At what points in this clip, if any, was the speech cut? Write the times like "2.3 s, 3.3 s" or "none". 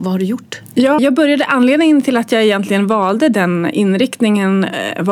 1.0 s